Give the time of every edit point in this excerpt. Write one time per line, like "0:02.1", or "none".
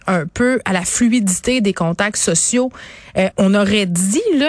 0:03.3